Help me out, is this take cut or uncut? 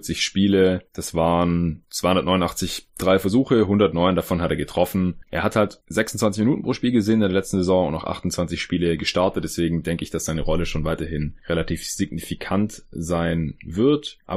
cut